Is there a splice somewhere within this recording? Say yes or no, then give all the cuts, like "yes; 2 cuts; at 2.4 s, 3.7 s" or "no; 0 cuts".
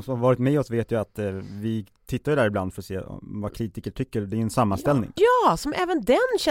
yes; 1 cut; at 5.2 s